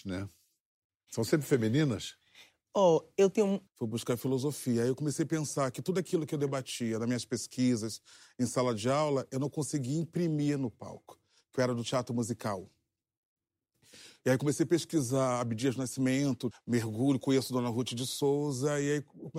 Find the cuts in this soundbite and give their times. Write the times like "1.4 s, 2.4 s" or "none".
3.7 s, 16.5 s

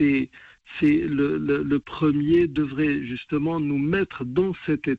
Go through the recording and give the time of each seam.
none

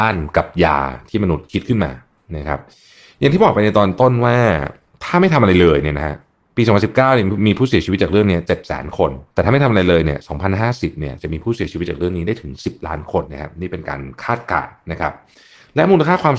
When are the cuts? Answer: 9.3 s, 13.2 s

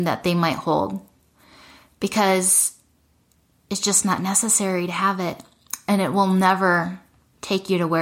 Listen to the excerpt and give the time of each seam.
none

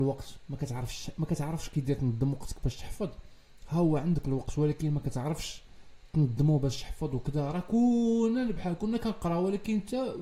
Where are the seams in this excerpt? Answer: 8.6 s

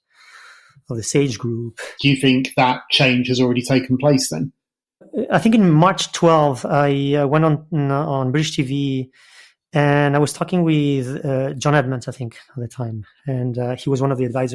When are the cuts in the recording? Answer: 2.0 s

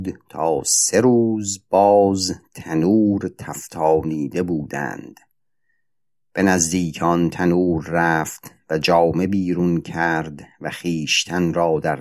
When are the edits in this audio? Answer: none

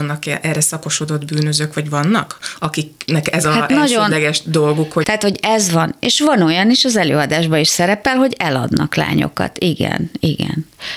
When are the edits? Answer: 5.0 s

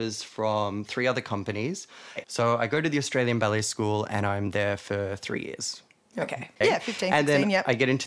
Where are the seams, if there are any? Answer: 2.2 s, 6.6 s

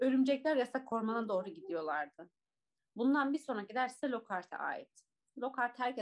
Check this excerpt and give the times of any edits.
2.8 s

